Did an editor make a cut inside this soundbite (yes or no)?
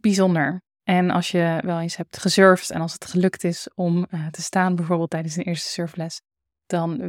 no